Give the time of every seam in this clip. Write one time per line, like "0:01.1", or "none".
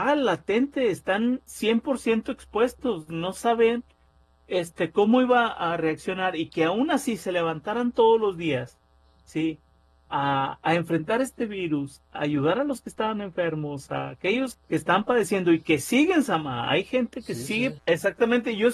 0:14.5
0:17.8

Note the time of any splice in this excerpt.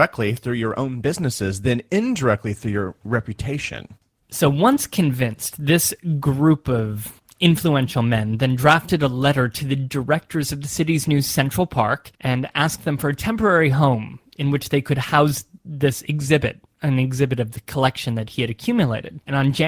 0:12.1

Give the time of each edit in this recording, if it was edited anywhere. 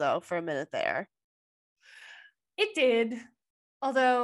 none

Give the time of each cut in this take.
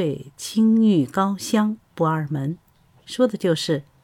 none

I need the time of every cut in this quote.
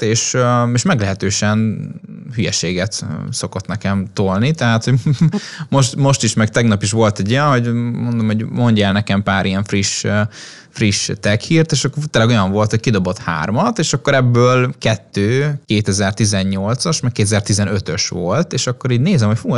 none

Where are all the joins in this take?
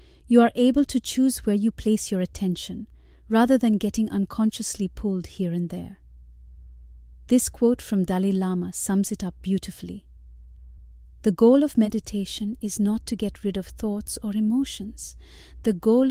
none

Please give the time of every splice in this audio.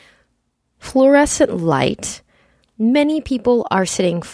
none

